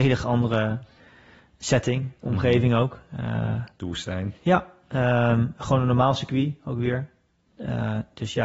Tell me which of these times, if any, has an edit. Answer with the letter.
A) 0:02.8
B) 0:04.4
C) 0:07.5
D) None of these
B